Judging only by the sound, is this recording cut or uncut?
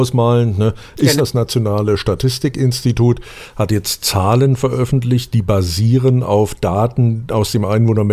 cut